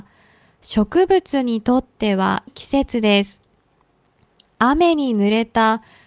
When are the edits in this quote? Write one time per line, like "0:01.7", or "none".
0:02.5